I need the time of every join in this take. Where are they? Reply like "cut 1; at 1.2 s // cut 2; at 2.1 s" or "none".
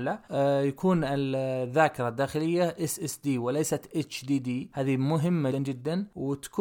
cut 1; at 5.5 s